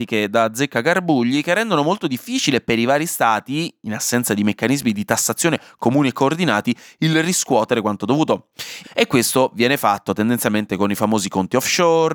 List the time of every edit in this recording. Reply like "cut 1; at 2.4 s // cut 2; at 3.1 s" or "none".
cut 1; at 8.8 s